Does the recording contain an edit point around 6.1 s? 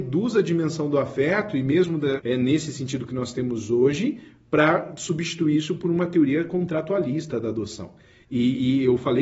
no; 2 cuts; at 2.2 s, 8.2 s

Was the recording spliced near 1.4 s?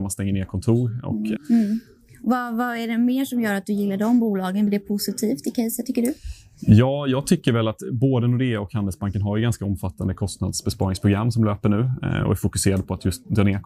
yes; 2 cuts; at 1.4 s, 4.7 s

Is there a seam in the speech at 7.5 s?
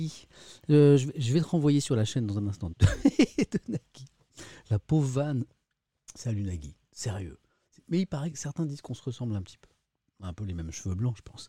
no; 1 cut; at 2.7 s

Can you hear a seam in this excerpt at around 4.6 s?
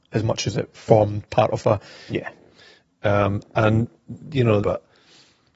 yes; 2 cuts; at 2.1 s, 4.6 s

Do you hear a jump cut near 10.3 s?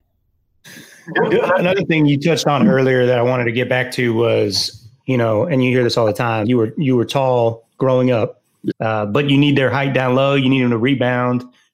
no; 2 cuts; at 6.4 s, 8.7 s

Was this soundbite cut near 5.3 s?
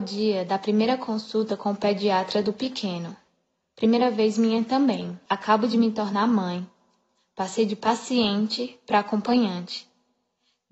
yes; 1 cut; at 5.3 s

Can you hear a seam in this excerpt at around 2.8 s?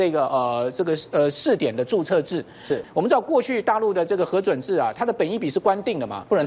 yes; 1 cut; at 2.8 s

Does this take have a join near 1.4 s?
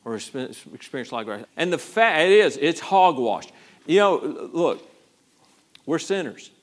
yes; 2 cuts; at 1.4 s, 3.8 s

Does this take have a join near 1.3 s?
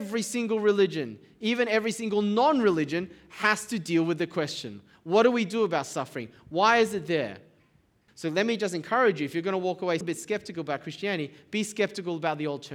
no; 2 cuts; at 8.1 s, 10.0 s

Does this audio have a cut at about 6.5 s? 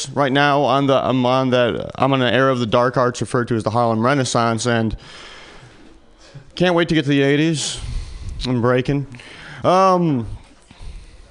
yes; 1 cut; at 6.5 s

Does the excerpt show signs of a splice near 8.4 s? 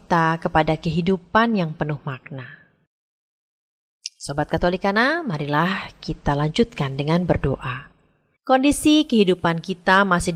yes; 1 cut; at 8.4 s

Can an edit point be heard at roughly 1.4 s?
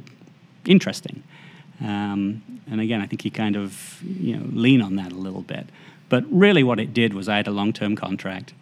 no; 0 cuts

